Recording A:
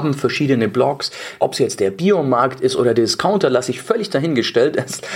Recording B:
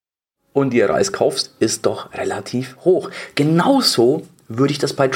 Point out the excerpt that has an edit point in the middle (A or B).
A